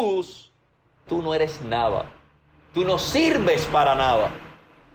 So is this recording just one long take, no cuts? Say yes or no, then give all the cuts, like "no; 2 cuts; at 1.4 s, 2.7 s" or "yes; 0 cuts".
no; 1 cut; at 1.1 s